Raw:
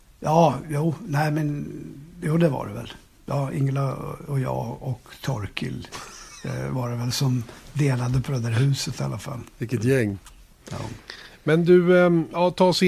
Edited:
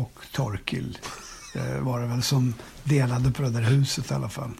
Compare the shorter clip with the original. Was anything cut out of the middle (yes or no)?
no